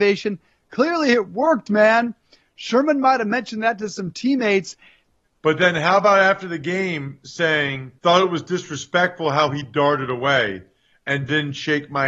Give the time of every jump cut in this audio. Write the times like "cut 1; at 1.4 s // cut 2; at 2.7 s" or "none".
cut 1; at 5.2 s // cut 2; at 8.0 s